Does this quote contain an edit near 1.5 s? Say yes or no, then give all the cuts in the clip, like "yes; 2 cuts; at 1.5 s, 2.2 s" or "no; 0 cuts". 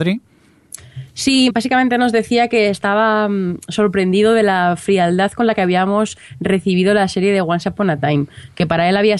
yes; 1 cut; at 1.5 s